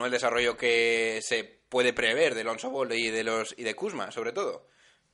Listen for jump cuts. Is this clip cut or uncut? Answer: uncut